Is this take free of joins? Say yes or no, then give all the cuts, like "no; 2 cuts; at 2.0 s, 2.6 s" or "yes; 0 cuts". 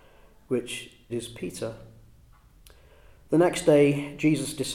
no; 1 cut; at 1.1 s